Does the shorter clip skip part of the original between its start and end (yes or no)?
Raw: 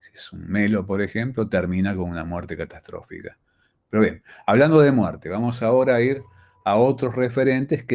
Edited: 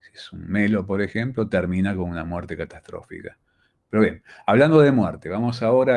no